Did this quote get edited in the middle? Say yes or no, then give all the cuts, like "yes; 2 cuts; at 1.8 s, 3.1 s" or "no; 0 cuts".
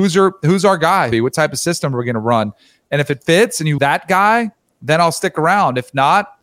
yes; 2 cuts; at 1.1 s, 3.8 s